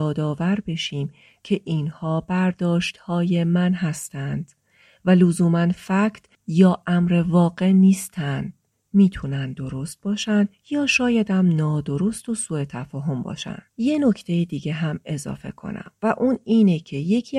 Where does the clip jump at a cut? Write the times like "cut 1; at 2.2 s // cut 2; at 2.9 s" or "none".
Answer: cut 1; at 13.7 s